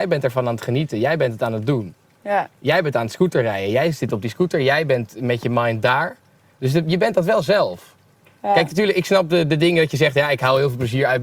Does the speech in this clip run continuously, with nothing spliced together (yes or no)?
yes